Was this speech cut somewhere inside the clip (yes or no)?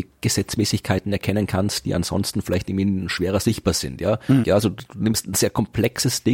yes